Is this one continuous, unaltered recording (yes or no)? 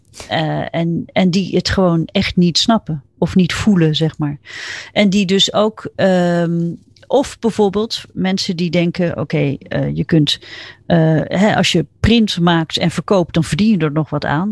yes